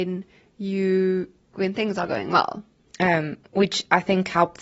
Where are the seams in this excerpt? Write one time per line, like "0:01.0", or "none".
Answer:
0:01.5
0:02.8